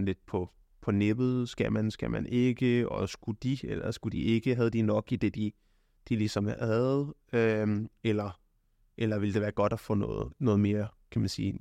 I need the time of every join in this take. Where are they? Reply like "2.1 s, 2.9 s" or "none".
none